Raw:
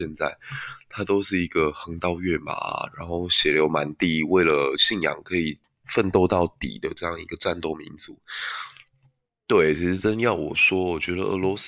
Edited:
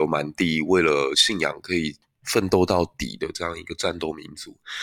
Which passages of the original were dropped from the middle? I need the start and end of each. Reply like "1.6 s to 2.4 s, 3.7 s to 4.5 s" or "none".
none